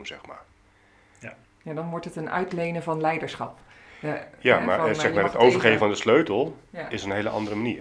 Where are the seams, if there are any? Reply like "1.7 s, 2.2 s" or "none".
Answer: 1.4 s